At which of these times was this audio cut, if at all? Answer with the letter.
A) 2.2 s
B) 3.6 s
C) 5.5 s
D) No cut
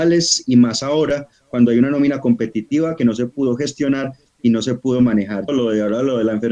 C